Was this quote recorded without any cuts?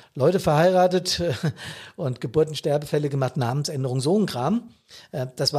yes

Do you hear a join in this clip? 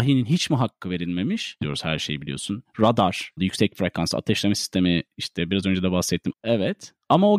yes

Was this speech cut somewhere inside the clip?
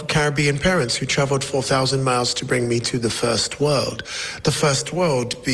no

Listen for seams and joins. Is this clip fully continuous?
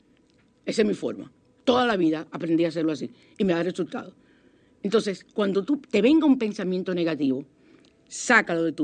yes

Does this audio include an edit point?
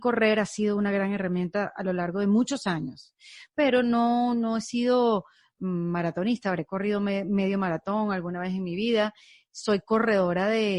no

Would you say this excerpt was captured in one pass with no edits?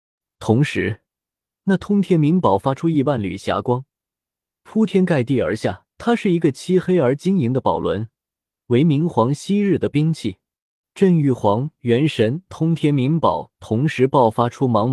no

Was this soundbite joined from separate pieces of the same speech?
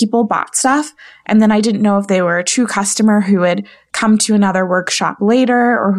no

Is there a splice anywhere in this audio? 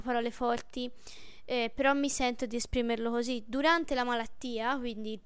no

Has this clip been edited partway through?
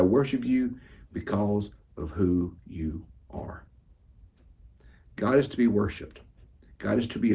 no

